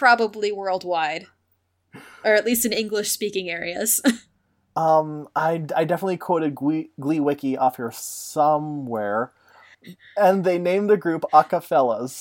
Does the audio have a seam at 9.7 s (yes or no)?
yes